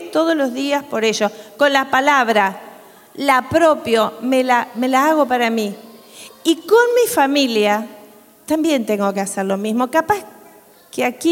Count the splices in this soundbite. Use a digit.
0